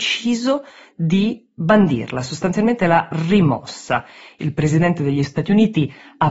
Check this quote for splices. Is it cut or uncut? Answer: cut